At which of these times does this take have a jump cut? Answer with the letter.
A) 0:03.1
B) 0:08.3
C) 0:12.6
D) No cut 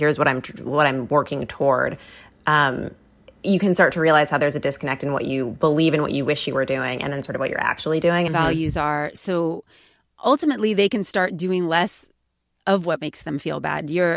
B